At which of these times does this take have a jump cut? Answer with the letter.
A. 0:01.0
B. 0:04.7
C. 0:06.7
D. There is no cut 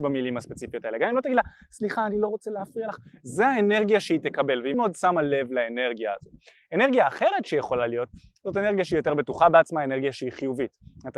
B